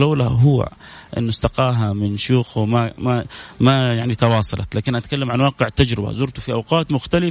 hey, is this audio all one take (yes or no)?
yes